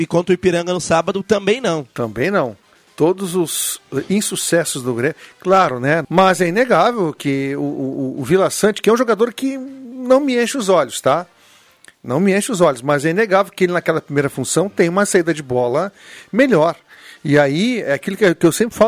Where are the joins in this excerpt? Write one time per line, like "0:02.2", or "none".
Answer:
0:06.0